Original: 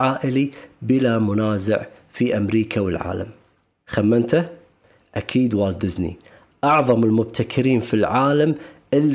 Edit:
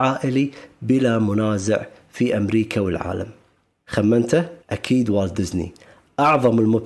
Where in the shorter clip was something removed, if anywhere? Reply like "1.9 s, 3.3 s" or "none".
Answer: 4.6 s

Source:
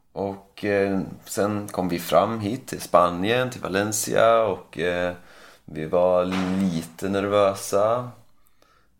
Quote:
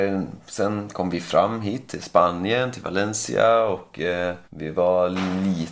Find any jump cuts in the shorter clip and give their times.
4.4 s

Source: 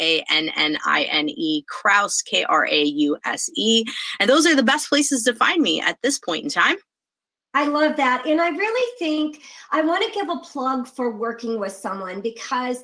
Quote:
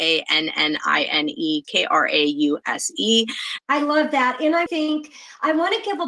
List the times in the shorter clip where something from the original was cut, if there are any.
1.6 s, 3.6 s, 4.7 s

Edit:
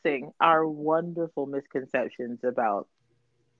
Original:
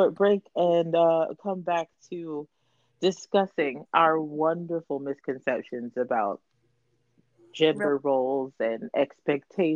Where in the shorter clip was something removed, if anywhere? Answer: none

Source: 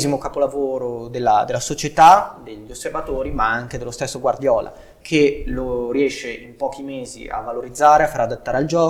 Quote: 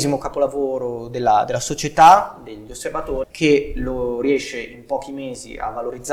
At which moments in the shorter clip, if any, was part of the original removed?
3.2 s

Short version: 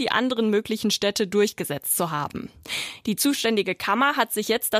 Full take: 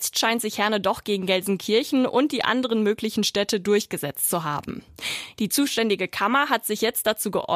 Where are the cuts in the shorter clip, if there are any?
none

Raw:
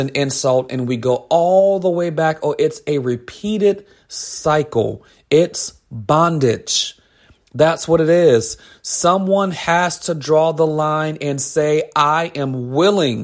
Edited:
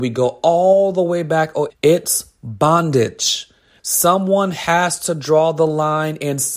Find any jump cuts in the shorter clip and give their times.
1.7 s, 3.8 s

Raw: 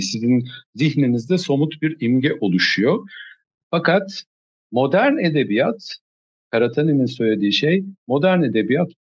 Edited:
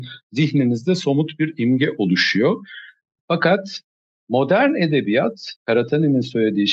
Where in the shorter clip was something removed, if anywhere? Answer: 5.6 s

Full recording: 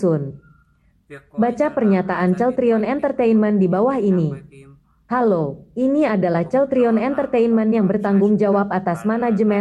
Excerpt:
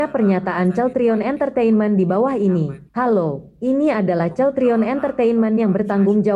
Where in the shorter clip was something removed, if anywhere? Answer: 2.9 s

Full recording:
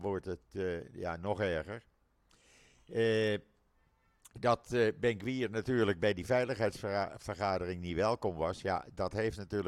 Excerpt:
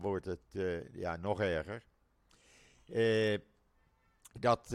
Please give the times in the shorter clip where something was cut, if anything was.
none

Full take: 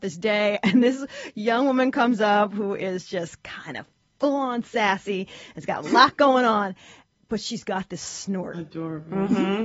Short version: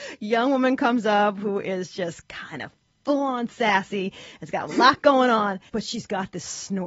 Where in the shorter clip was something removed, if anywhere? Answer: 5.7 s

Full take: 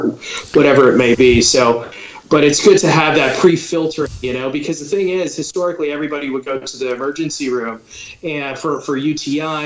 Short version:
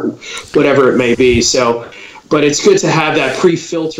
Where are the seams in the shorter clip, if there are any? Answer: none

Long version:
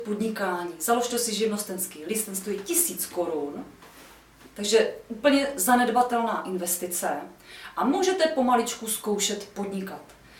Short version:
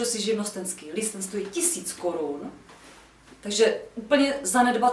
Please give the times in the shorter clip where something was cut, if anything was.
none

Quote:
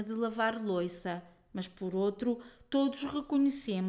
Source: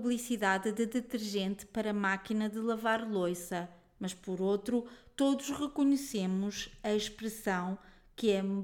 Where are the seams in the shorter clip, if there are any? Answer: none

